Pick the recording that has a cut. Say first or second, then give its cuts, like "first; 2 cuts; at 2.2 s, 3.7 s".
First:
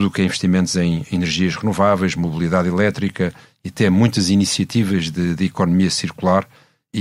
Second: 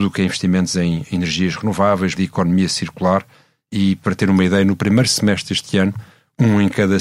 second; 1 cut; at 2.2 s